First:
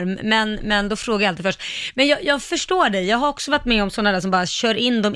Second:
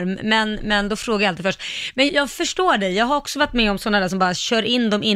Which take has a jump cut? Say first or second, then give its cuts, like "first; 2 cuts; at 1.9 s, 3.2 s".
second; 1 cut; at 2.1 s